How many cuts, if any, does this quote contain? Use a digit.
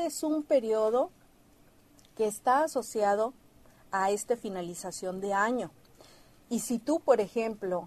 0